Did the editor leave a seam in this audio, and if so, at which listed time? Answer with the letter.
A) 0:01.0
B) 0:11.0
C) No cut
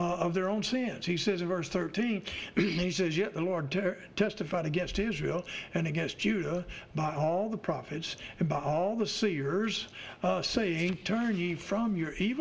C